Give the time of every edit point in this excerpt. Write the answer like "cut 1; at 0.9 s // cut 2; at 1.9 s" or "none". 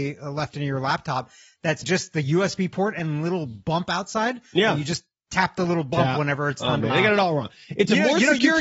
cut 1; at 1.8 s // cut 2; at 6.9 s